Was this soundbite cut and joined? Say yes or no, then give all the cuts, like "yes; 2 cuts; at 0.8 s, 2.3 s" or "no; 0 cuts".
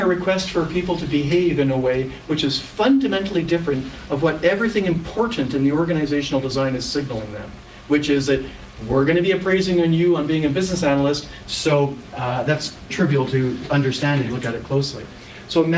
yes; 3 cuts; at 11.4 s, 12.9 s, 14.3 s